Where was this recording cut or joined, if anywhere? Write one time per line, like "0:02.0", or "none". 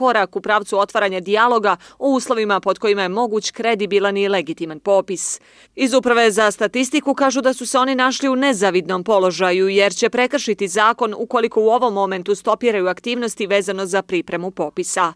0:05.7

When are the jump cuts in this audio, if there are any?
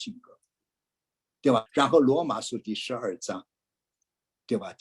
0:01.7

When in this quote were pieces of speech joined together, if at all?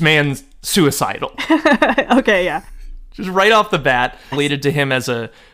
0:04.3

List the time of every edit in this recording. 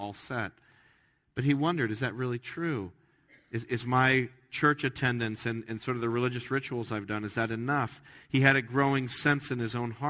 none

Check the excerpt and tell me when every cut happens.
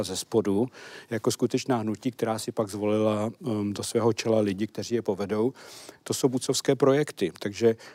none

